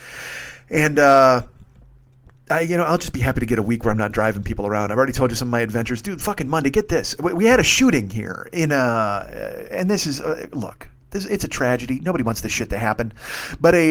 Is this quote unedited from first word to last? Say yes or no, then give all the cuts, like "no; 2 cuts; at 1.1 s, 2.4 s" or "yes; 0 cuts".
yes; 0 cuts